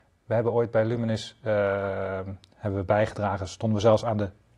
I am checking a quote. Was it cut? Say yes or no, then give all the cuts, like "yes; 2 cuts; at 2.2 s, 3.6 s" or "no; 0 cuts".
no; 0 cuts